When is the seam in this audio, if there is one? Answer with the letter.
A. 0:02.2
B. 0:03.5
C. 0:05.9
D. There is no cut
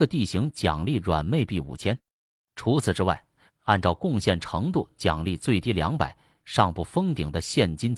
B